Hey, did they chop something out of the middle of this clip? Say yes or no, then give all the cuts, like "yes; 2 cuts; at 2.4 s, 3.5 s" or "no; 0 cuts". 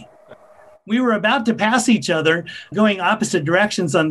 yes; 1 cut; at 2.7 s